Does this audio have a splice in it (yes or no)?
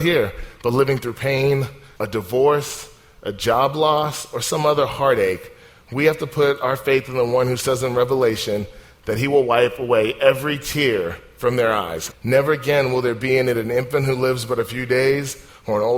yes